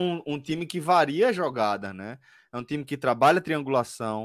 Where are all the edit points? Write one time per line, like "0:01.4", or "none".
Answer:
none

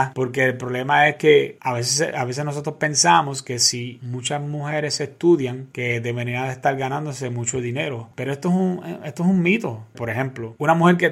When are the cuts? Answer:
0:08.1
0:09.9

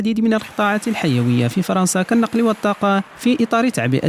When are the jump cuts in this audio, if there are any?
0:03.1

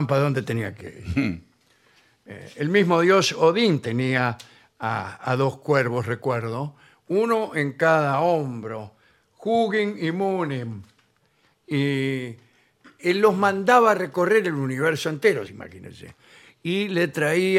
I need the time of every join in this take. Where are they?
0:15.5

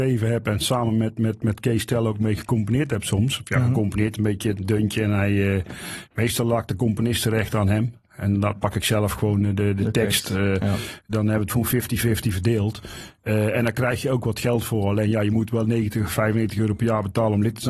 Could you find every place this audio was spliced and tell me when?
none

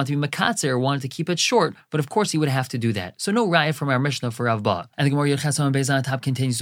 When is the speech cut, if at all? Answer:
0:04.9

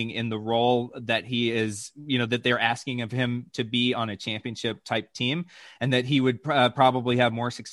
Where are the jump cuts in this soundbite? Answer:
none

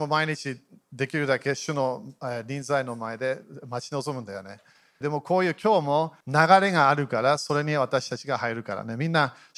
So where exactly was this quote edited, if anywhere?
0:05.0
0:06.2

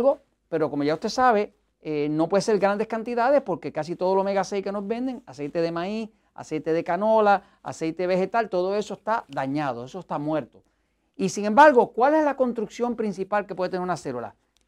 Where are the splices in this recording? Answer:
none

